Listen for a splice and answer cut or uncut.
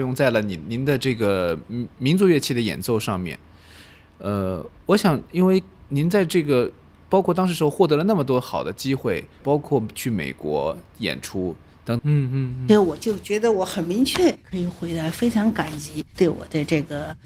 cut